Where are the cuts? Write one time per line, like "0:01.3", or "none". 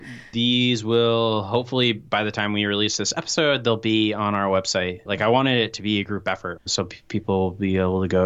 0:05.1
0:06.6

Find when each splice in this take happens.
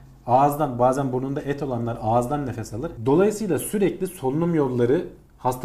0:03.0

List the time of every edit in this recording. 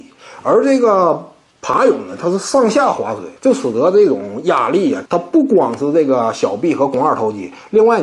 0:03.4
0:05.1

